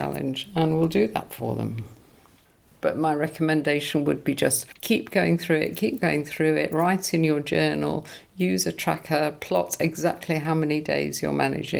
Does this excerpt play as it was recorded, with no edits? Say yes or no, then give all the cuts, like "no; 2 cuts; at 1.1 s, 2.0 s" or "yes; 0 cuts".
no; 1 cut; at 2.8 s